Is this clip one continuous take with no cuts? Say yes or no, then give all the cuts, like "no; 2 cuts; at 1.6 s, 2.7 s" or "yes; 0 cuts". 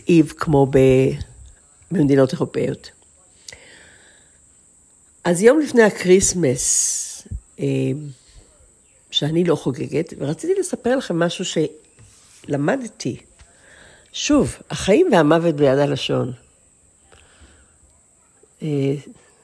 yes; 0 cuts